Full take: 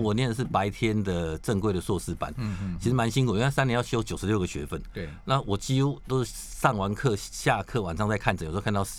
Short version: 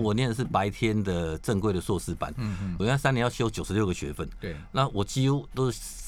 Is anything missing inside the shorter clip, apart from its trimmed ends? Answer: yes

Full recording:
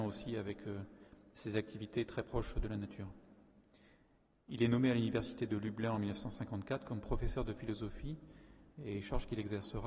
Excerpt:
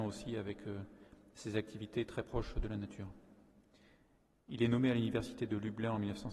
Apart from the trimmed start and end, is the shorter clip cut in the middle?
no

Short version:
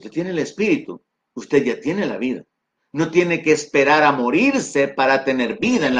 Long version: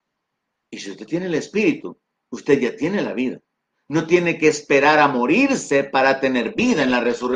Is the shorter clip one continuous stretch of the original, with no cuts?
yes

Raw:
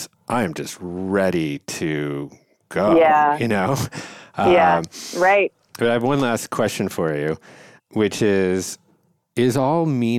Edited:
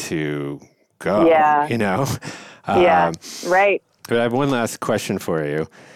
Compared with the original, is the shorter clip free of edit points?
yes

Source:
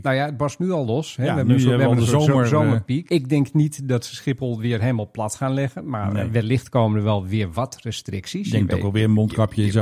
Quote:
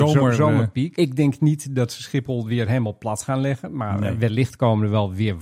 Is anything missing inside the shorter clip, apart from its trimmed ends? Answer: no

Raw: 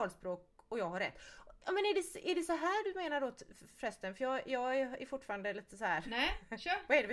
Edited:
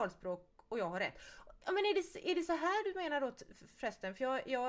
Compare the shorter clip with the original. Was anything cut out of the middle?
no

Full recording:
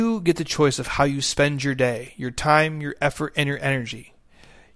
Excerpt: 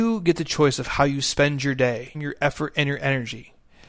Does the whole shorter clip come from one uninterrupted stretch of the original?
no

